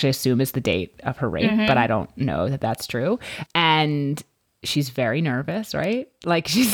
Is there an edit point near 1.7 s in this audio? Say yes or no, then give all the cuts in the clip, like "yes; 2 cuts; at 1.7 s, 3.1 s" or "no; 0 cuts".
no; 0 cuts